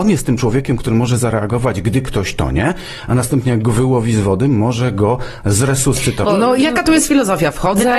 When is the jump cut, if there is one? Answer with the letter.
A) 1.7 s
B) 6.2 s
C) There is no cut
B